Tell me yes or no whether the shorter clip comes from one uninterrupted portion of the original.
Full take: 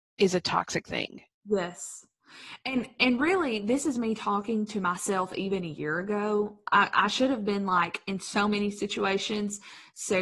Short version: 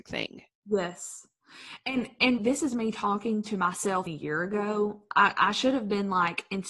no